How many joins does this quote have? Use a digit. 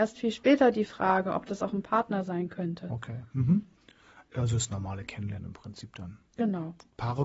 0